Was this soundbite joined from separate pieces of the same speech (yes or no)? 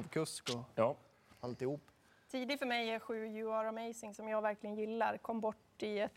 no